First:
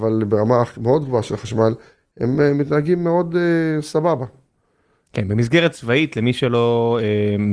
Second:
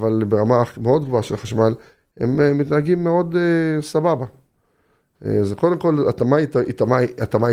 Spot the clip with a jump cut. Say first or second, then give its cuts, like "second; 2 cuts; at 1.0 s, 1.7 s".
first; 1 cut; at 5.1 s